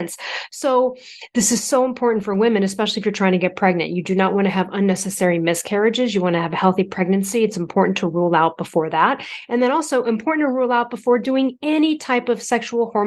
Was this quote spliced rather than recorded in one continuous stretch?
no; 0 cuts

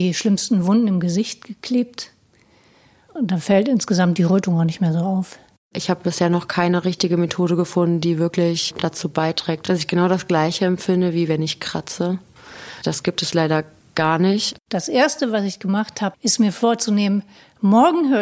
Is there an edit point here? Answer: yes; 2 cuts; at 14.6 s, 16.1 s

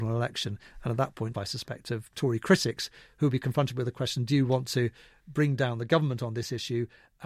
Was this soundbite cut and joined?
yes; 1 cut; at 1.3 s

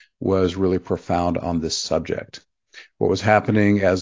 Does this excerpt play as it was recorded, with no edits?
yes; 0 cuts

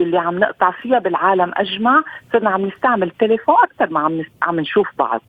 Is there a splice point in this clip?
no; 0 cuts

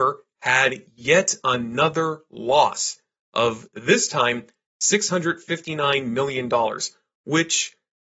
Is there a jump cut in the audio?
no; 0 cuts

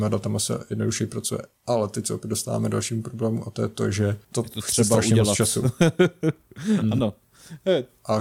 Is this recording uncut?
yes; 0 cuts

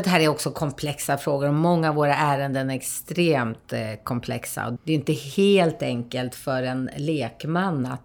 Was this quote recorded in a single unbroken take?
no; 1 cut; at 4.8 s

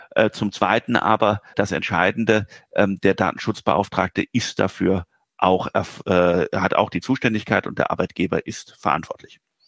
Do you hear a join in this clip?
yes; 1 cut; at 1.5 s

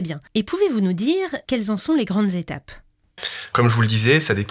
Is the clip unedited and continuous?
no; 1 cut; at 3.5 s

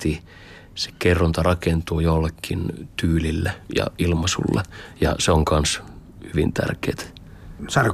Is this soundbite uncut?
yes; 0 cuts

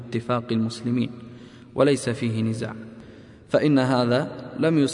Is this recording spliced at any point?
no; 0 cuts

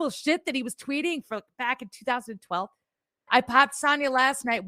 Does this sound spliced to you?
yes; 1 cut; at 3.3 s

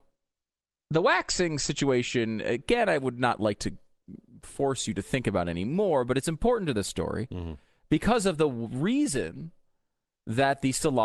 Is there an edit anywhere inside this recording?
no; 0 cuts

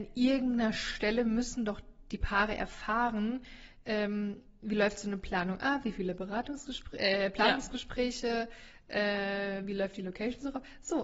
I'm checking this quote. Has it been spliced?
no; 0 cuts

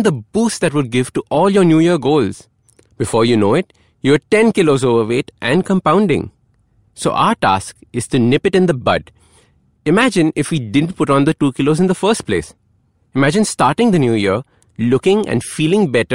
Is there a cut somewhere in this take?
yes; 1 cut; at 2.9 s

